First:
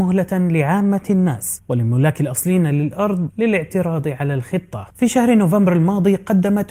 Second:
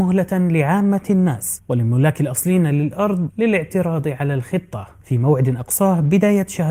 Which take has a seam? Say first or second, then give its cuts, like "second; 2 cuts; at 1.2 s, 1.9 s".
first; 1 cut; at 4.9 s